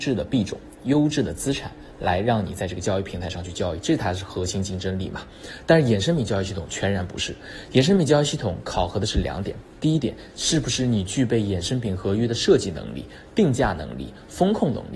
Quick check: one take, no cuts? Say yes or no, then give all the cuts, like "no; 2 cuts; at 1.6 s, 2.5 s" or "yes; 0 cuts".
yes; 0 cuts